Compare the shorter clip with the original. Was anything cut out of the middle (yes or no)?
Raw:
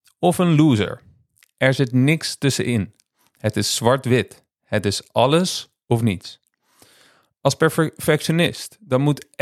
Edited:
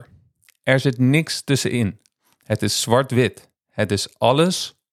no